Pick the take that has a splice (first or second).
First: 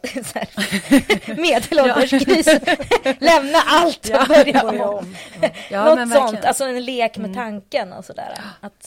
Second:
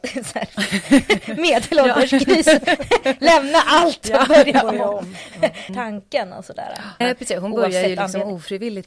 second